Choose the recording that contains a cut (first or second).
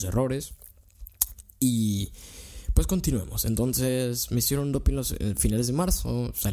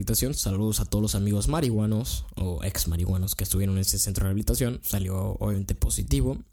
second